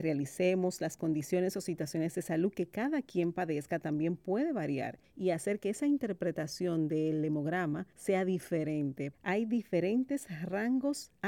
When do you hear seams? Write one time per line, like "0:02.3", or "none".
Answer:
0:09.1